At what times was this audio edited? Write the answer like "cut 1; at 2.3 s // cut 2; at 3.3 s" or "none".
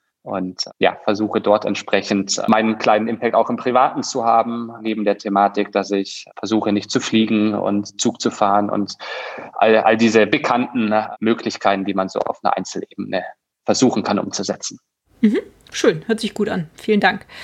none